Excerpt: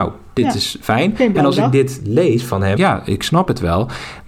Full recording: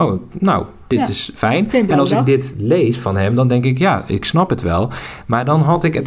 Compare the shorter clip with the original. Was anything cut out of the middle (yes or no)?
yes